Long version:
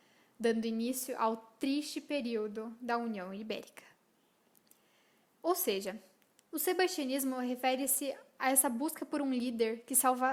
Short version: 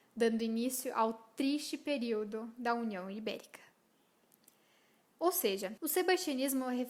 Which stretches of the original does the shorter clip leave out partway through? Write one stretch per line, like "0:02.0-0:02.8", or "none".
0:06.0-0:06.5